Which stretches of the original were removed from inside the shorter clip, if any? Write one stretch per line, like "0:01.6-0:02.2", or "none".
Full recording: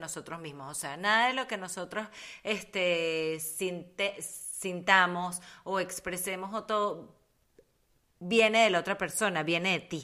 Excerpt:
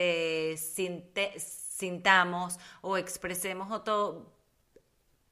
none